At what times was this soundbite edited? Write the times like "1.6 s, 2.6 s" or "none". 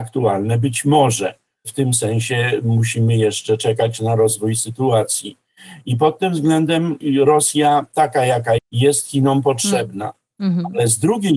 8.6 s